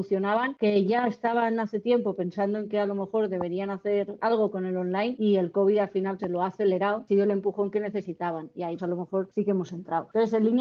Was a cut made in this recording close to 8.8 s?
yes; 2 cuts; at 6.2 s, 8.8 s

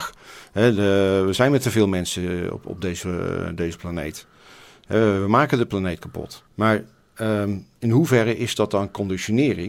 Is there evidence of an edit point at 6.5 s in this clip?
yes; 1 cut; at 6.5 s

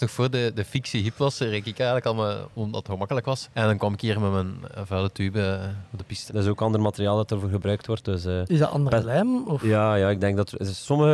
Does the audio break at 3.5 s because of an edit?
yes; 2 cuts; at 3.5 s, 6.3 s

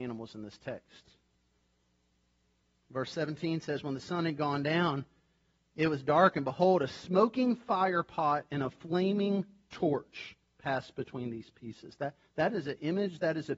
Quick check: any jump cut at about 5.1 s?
no; 0 cuts

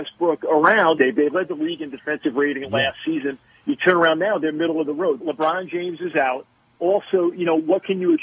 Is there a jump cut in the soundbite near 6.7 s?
no; 2 cuts; at 1.0 s, 5.2 s

